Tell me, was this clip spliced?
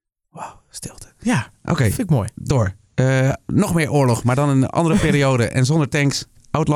no; 0 cuts

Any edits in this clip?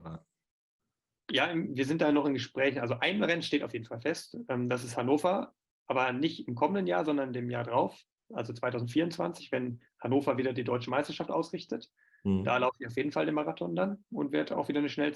no; 0 cuts

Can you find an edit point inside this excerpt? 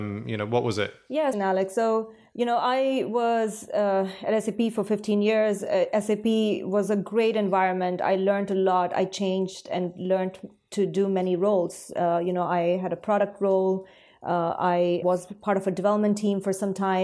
yes; 2 cuts; at 1.3 s, 15.0 s

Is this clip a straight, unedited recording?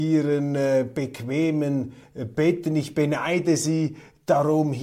yes; 0 cuts

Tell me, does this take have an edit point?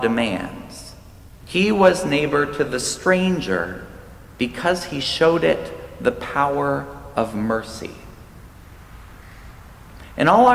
yes; 2 cuts; at 1.4 s, 4.4 s

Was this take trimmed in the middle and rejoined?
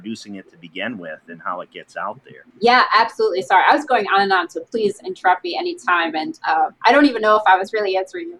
yes; 1 cut; at 2.5 s

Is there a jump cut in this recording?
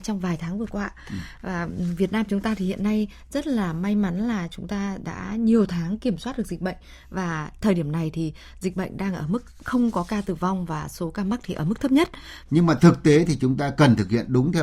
yes; 1 cut; at 12.5 s

